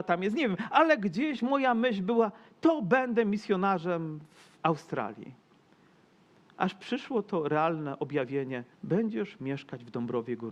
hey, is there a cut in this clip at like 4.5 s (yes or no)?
yes